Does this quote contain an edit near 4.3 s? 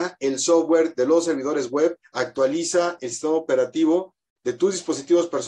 no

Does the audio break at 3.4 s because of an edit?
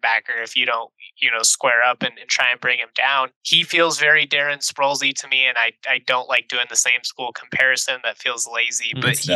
yes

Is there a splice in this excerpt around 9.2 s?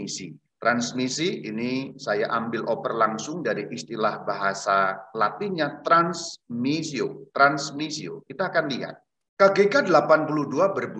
yes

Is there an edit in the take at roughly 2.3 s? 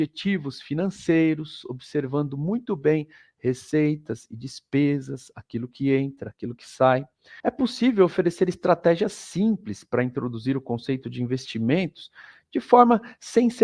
no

